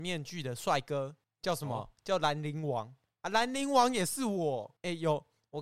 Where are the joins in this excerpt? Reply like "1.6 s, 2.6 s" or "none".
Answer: none